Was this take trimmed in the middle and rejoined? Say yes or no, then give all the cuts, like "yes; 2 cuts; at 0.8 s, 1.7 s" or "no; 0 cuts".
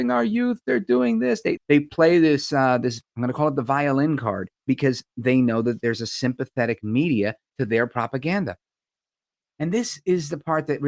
yes; 2 cuts; at 1.6 s, 4.6 s